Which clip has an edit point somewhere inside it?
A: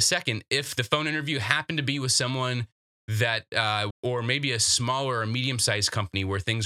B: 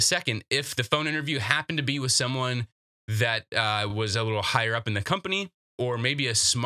A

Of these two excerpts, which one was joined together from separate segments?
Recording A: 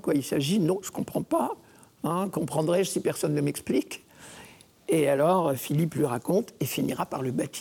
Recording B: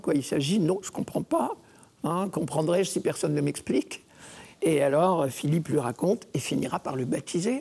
B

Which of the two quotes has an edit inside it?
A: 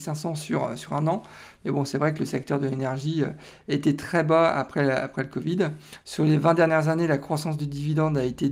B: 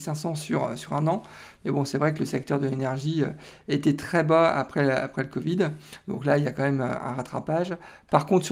A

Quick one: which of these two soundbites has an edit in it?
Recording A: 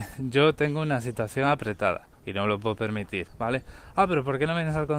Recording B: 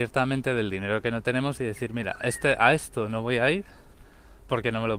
A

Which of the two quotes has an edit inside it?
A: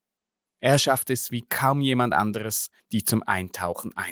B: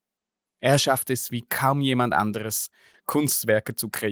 A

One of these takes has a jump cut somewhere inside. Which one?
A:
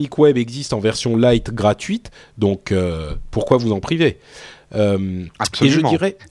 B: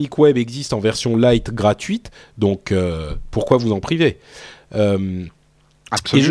A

